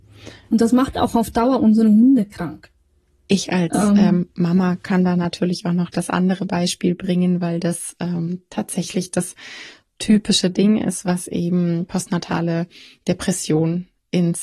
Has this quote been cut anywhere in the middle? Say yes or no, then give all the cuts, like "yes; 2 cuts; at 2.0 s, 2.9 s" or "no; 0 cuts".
no; 0 cuts